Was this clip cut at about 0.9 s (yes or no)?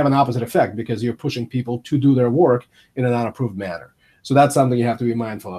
no